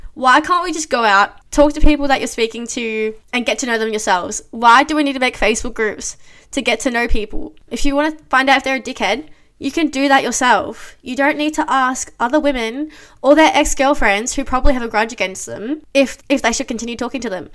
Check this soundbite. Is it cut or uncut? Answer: cut